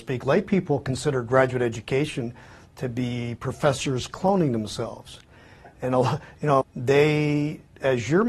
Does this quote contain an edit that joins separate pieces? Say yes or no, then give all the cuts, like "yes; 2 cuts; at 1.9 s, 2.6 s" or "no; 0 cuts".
yes; 1 cut; at 6.6 s